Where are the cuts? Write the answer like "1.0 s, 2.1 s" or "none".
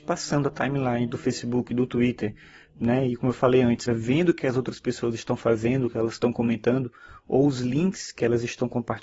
3.9 s